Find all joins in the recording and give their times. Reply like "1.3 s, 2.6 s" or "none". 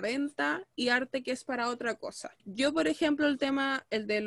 2.4 s